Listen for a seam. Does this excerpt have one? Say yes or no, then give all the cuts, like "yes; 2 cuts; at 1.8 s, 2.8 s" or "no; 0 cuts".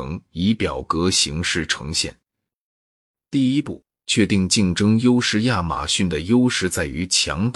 no; 0 cuts